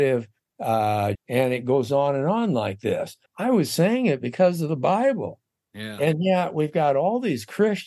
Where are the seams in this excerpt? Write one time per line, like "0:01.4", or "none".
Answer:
0:01.1
0:03.3